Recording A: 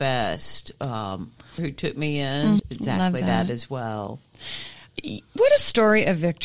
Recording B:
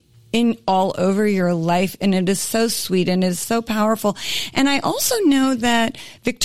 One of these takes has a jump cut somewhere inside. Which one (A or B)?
A